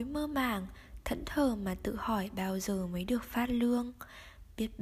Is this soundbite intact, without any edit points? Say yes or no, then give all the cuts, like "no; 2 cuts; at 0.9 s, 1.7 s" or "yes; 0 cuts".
yes; 0 cuts